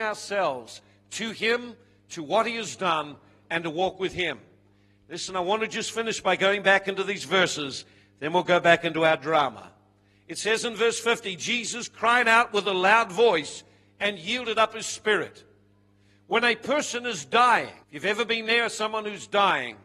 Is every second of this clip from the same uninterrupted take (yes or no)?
no